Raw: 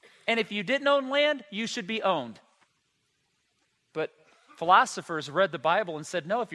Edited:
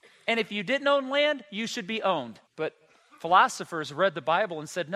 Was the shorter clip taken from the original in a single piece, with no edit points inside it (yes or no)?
no